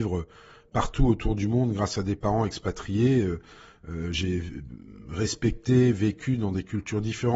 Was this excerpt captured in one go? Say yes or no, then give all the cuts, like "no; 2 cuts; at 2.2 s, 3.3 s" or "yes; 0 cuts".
yes; 0 cuts